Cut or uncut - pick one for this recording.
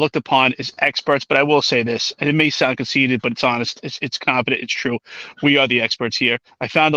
uncut